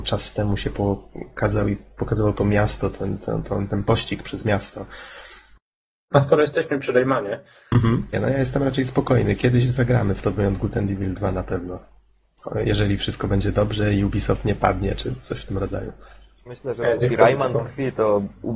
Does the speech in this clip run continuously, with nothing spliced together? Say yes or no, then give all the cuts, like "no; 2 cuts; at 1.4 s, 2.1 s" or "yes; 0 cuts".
no; 3 cuts; at 6.1 s, 8.1 s, 16.5 s